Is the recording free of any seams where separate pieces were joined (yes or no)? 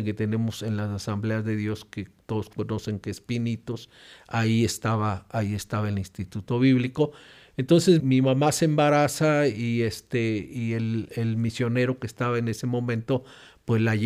no